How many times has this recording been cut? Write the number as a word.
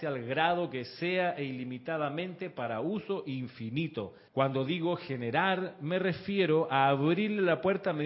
one